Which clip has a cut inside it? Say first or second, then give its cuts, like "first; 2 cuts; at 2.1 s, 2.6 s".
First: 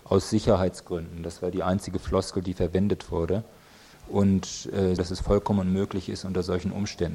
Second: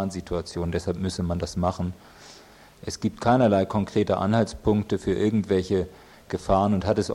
first; 2 cuts; at 3.9 s, 5.0 s